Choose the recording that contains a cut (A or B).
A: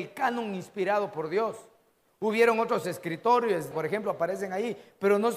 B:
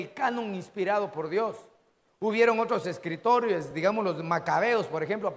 A